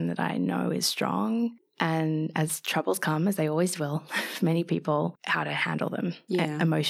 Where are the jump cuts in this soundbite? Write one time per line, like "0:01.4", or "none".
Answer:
none